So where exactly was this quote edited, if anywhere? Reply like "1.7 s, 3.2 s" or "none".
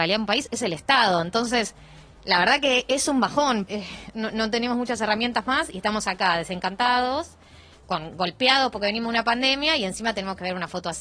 3.7 s